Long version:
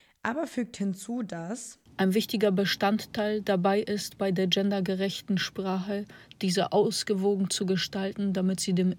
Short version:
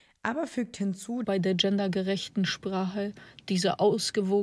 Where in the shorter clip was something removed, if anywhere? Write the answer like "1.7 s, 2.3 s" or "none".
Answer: 1.2 s